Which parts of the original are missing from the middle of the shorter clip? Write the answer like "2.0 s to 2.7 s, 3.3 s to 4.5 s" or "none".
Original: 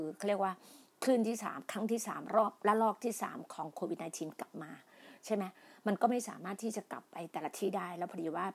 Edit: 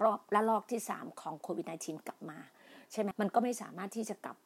5.4 s to 5.8 s